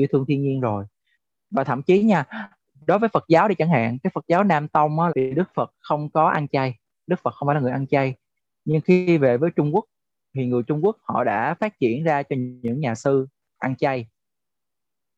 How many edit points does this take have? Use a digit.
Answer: 1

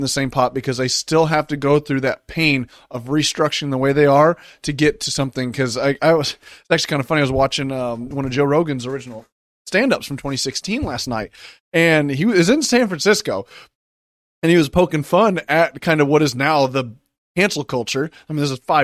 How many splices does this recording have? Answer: 0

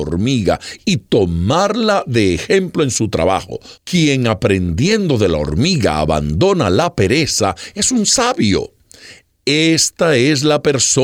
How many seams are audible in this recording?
1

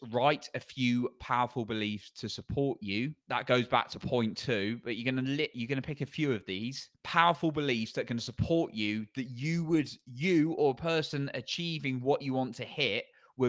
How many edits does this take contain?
2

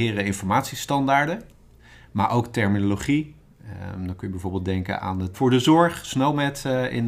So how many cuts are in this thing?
1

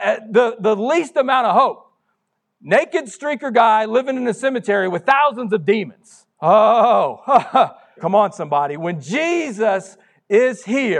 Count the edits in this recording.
2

